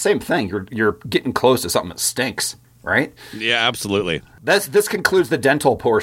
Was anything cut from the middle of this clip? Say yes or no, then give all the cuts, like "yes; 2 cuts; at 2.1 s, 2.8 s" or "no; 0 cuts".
no; 0 cuts